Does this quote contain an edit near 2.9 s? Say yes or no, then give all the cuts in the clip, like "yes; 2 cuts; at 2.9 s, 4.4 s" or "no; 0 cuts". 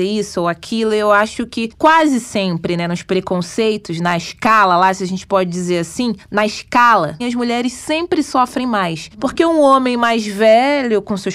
no; 1 cut; at 7.2 s